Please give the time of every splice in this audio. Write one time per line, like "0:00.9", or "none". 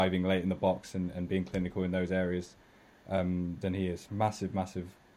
0:04.1